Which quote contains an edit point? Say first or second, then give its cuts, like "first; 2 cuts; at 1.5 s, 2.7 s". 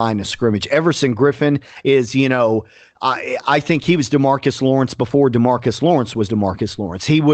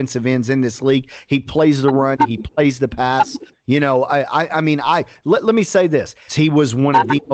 second; 2 cuts; at 3.5 s, 6.3 s